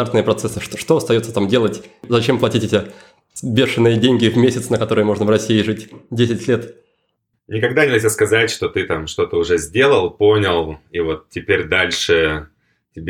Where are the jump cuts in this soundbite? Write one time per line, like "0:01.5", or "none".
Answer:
none